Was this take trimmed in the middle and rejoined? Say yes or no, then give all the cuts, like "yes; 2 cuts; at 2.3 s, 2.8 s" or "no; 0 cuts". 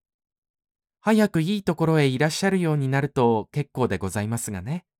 no; 0 cuts